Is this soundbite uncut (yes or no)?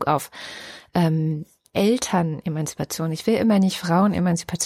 no